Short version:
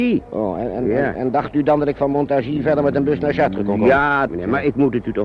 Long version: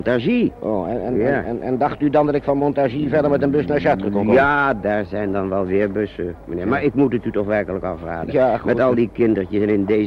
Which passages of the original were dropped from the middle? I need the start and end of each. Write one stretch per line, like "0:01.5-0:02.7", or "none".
0:01.4-0:01.6
0:04.7-0:06.5